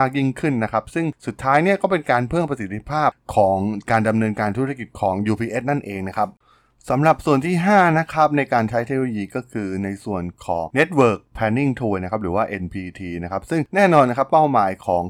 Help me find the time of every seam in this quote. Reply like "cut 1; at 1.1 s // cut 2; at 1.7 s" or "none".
none